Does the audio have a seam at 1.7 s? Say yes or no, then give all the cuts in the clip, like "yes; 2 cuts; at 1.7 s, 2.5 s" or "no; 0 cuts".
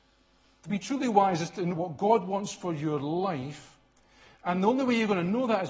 yes; 1 cut; at 1.7 s